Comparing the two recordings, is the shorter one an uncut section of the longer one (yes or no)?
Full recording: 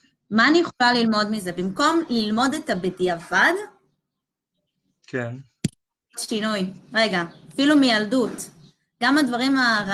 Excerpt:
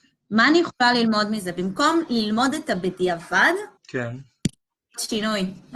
no